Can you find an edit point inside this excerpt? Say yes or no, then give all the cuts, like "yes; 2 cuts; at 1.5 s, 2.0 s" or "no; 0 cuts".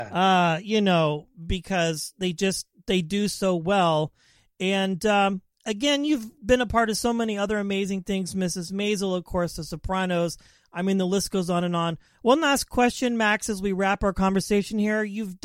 no; 0 cuts